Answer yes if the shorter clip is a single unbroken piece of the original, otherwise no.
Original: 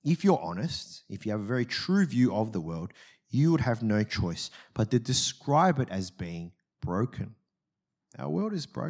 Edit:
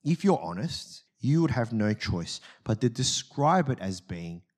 no